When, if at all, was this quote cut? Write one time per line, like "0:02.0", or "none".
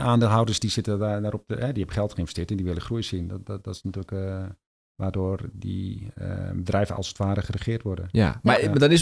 none